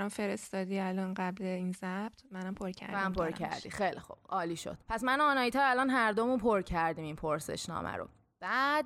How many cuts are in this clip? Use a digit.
1